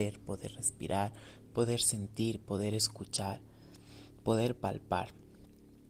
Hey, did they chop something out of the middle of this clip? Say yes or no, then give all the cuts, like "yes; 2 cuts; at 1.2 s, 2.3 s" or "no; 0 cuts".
no; 0 cuts